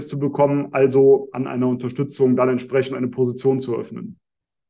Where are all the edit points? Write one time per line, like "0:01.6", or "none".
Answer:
none